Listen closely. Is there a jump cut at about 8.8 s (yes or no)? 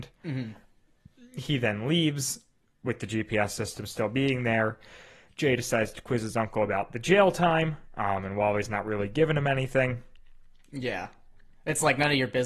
no